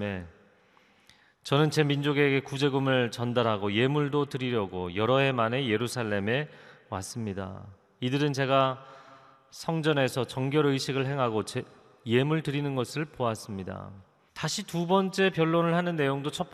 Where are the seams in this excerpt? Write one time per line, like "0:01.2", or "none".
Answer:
0:14.3